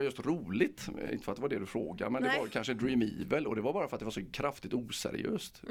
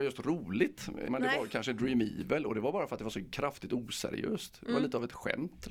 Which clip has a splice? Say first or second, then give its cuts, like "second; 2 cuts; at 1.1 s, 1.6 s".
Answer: second; 1 cut; at 1.1 s